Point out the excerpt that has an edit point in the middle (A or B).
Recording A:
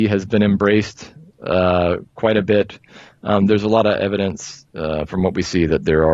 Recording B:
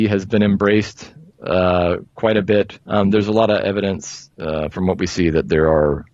B